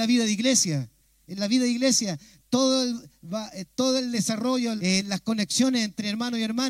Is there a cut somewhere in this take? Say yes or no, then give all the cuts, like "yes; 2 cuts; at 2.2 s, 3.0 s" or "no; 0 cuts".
yes; 1 cut; at 4.8 s